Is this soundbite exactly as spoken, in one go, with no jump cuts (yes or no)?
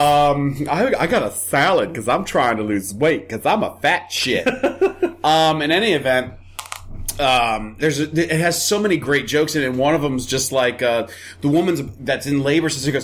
no